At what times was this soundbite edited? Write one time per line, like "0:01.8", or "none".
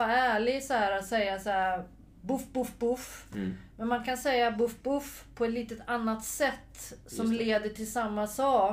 0:04.8